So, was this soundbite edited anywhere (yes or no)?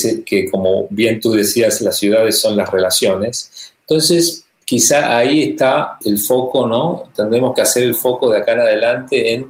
yes